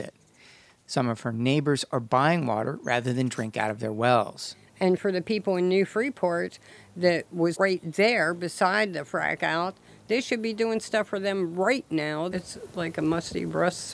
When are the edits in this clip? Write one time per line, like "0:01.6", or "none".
0:07.5
0:12.3